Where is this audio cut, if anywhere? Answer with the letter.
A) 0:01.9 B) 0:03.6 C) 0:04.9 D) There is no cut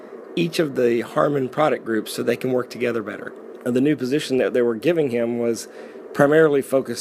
B